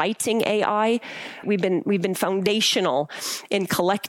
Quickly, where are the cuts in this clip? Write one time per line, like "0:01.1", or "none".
0:01.4